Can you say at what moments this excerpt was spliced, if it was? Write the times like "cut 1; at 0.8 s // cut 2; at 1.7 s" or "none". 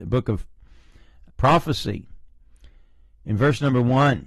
cut 1; at 1.3 s